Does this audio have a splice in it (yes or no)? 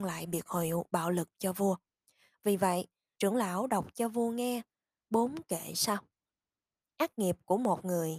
yes